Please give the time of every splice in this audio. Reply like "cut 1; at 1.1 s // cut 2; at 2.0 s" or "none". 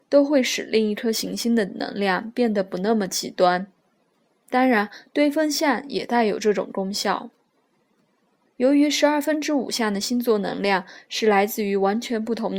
cut 1; at 8.5 s